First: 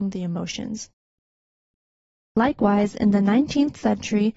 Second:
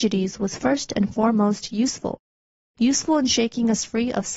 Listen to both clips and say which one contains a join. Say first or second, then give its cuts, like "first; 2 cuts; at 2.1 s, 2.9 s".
first; 1 cut; at 2.3 s